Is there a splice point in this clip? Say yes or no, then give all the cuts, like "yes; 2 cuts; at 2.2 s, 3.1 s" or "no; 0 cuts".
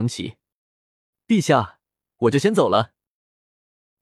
yes; 1 cut; at 2.0 s